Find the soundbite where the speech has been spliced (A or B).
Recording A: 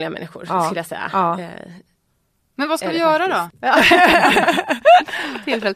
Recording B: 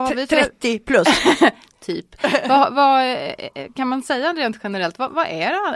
A